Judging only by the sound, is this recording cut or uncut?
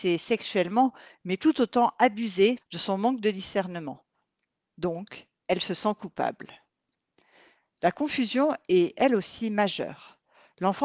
cut